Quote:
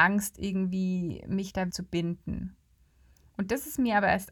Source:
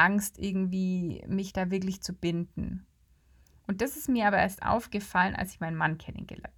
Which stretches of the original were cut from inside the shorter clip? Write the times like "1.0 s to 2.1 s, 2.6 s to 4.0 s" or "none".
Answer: 1.7 s to 2.0 s